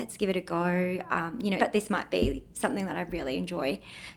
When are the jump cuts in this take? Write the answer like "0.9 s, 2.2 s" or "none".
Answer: 1.6 s